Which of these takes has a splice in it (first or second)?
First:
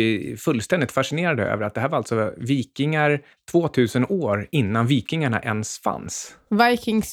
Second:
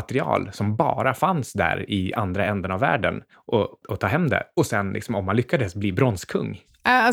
second